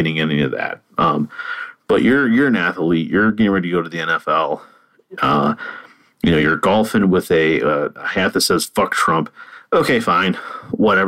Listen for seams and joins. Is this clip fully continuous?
yes; 0 cuts

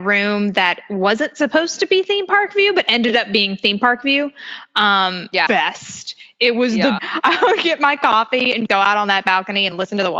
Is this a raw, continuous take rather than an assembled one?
no; 3 cuts; at 5.5 s, 7.0 s, 8.7 s

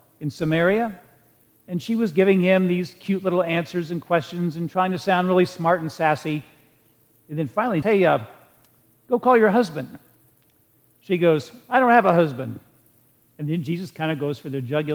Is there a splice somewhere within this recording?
yes; 1 cut; at 7.8 s

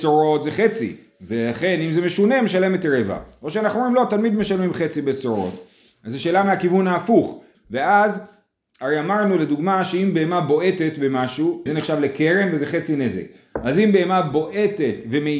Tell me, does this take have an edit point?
yes; 3 cuts; at 5.9 s, 7.5 s, 11.7 s

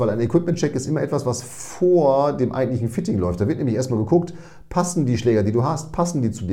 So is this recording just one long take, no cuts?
yes; 0 cuts

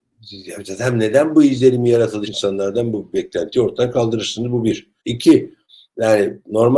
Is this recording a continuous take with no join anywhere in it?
no; 2 cuts; at 2.2 s, 5.0 s

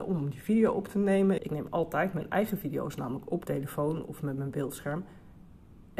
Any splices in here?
yes; 2 cuts; at 1.4 s, 3.4 s

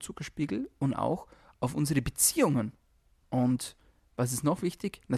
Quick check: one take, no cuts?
no; 1 cut; at 3.2 s

